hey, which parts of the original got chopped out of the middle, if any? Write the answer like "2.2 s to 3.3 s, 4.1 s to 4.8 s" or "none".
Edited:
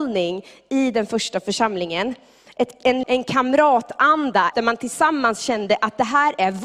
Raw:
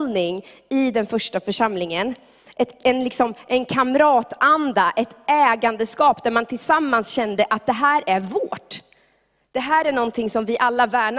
3.0 s to 3.4 s, 4.9 s to 6.2 s